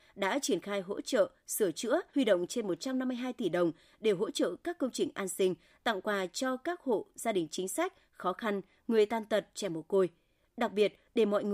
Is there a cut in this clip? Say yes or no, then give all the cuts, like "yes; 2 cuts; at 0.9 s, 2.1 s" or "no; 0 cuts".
yes; 1 cut; at 2.1 s